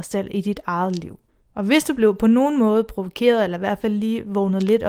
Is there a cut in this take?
no; 0 cuts

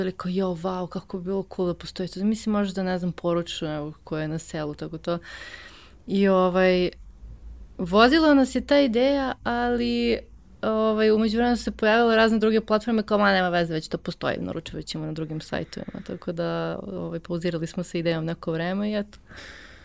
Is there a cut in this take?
no; 0 cuts

